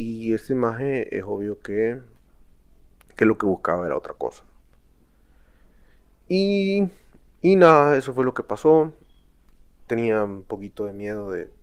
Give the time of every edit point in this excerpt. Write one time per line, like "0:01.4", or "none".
0:09.8